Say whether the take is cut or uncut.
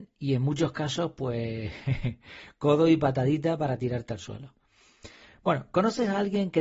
uncut